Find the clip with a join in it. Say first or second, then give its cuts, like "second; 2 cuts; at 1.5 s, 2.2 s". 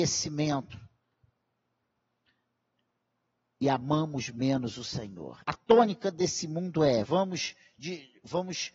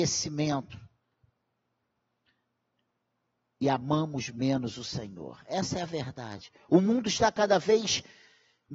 first; 2 cuts; at 5.4 s, 7.1 s